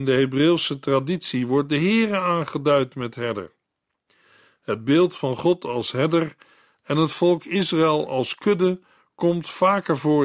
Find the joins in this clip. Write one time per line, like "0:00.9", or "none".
none

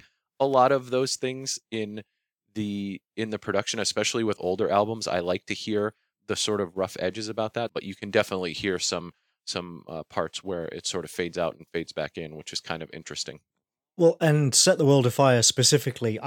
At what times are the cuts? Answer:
0:07.7

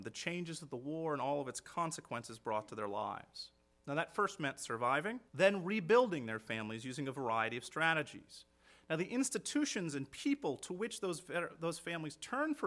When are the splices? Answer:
0:05.3

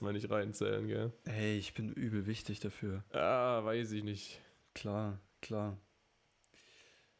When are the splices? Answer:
none

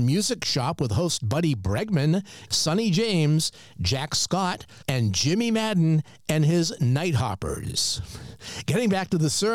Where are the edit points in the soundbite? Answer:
0:02.5
0:04.8

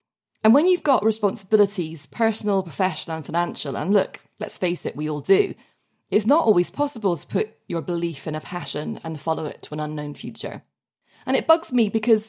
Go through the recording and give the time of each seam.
none

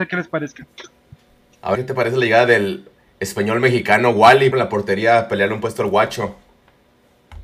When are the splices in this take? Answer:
0:01.7
0:04.5

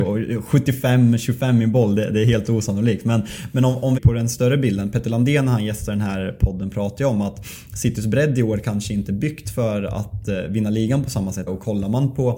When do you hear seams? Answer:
0:04.0
0:11.5

